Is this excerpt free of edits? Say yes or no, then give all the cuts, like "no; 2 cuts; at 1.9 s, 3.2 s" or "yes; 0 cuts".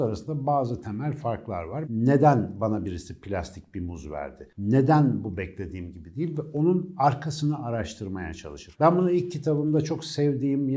no; 1 cut; at 1.8 s